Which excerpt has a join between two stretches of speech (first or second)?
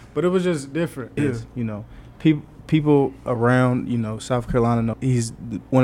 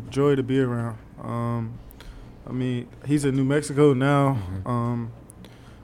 first